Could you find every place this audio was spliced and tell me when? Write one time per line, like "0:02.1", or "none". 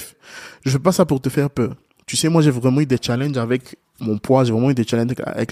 none